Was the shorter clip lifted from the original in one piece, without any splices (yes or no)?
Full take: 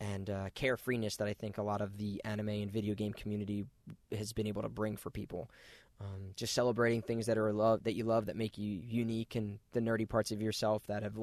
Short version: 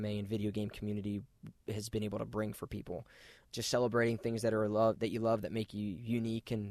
no